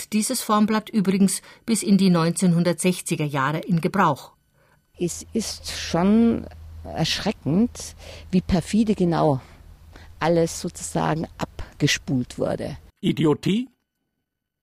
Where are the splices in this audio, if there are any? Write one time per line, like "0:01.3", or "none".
0:04.8
0:12.9